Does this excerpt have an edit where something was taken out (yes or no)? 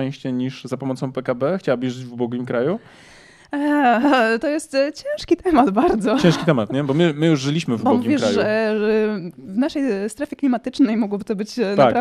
no